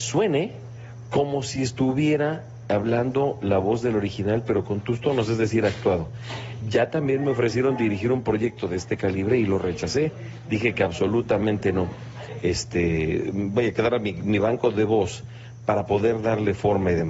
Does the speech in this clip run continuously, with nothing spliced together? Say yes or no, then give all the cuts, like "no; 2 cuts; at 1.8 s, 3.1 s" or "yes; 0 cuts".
no; 1 cut; at 12.4 s